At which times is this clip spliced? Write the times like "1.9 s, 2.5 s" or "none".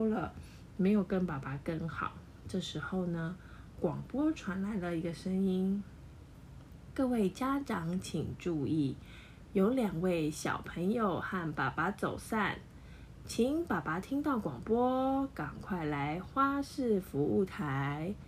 none